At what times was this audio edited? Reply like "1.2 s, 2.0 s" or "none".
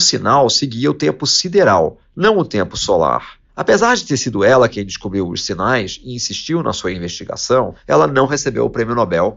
3.5 s